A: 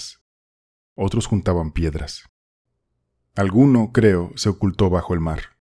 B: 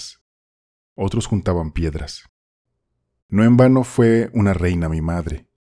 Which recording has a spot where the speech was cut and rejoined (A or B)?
B